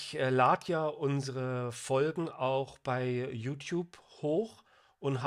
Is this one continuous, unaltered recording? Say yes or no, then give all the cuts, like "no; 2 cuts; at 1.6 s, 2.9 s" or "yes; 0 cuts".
yes; 0 cuts